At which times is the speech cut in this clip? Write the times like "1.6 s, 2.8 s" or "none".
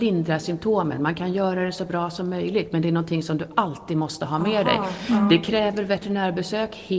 none